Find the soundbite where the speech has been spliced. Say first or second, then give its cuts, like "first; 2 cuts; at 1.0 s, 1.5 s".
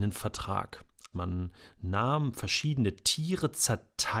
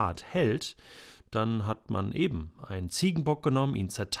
first; 1 cut; at 1.1 s